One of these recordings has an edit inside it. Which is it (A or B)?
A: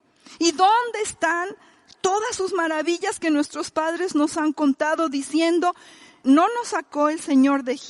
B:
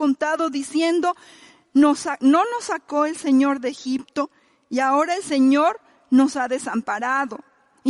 A